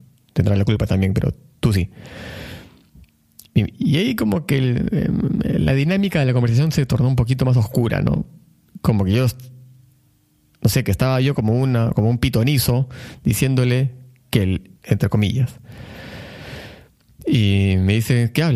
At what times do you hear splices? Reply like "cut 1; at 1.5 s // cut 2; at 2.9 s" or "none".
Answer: cut 1; at 14.8 s